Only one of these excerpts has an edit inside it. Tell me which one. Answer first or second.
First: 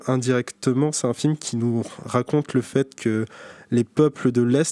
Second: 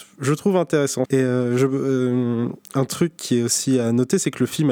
second